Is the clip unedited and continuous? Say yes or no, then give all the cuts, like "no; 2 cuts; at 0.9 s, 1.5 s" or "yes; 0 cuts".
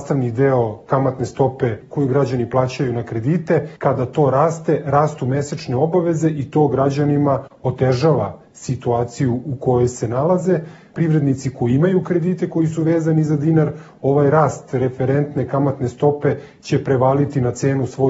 yes; 0 cuts